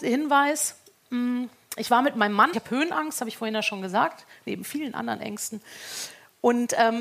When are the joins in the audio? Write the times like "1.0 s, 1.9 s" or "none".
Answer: 2.5 s

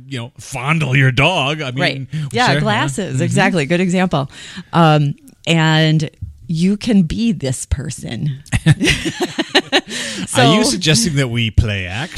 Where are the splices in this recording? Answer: 2.3 s

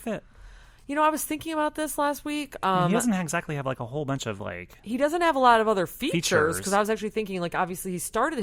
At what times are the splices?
none

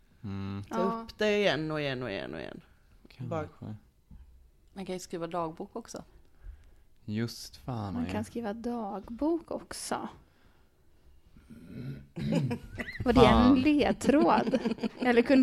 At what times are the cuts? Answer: 7.9 s

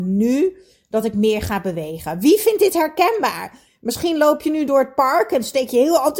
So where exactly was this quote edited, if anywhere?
none

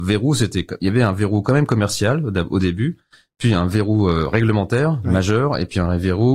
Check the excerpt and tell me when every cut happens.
none

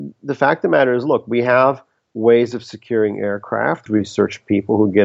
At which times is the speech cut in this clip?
3.9 s

